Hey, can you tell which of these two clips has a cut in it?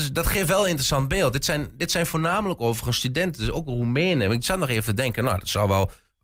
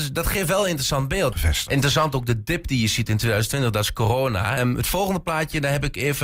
second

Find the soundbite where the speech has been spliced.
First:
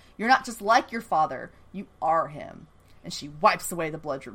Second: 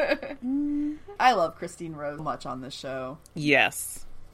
second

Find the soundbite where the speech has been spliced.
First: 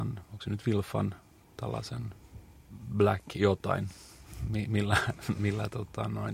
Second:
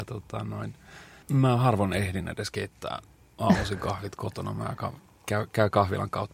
second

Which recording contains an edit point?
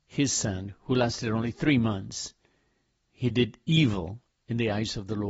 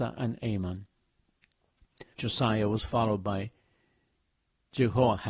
second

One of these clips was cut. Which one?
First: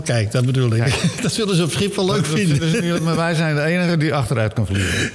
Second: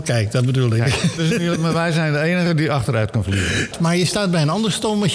second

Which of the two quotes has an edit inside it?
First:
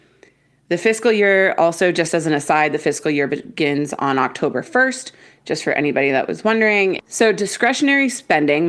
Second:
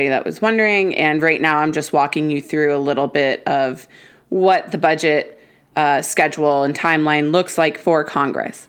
first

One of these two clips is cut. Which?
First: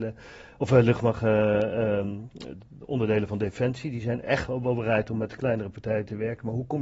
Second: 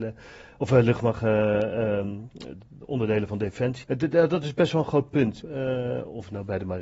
second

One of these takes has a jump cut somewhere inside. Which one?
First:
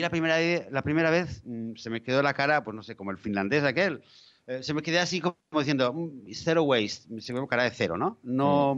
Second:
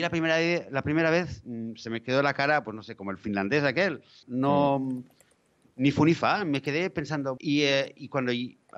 second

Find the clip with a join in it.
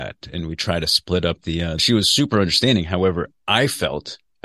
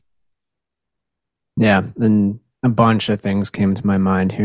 first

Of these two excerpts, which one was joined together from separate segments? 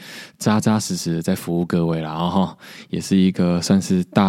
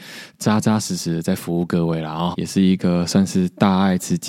second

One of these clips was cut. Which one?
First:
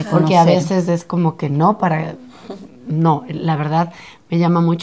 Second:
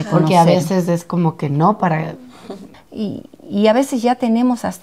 second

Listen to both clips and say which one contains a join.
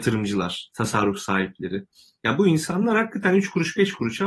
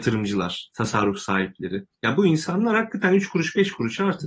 second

